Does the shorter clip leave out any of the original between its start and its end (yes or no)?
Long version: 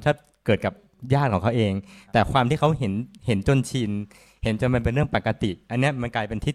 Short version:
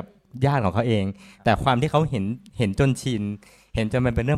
no